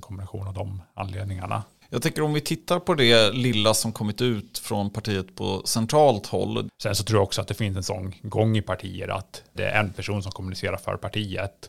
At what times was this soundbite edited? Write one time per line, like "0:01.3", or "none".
0:01.8
0:06.7
0:09.6